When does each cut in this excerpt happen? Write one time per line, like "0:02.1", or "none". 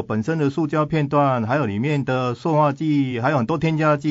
none